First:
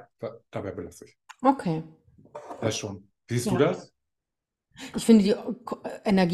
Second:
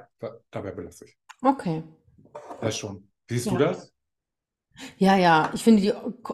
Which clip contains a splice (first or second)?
first